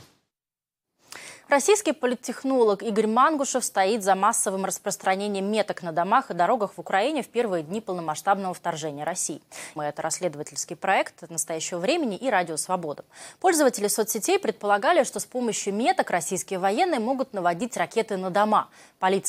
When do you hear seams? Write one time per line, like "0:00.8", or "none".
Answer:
0:09.8